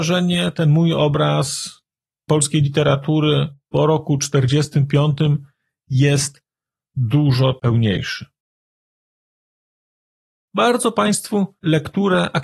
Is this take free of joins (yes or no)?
yes